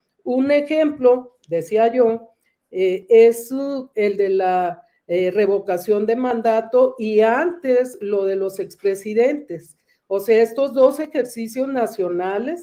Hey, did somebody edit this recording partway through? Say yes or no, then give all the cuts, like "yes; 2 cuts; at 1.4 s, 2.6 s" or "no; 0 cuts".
no; 0 cuts